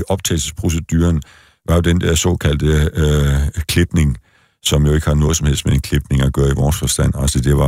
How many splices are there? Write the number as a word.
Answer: zero